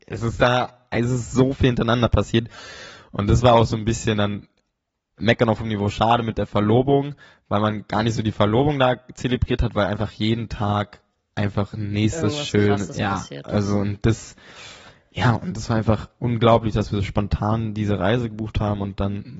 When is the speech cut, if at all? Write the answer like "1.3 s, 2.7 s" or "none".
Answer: none